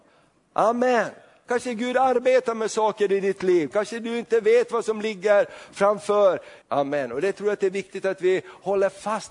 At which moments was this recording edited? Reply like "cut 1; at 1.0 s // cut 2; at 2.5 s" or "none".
cut 1; at 3.7 s // cut 2; at 6.6 s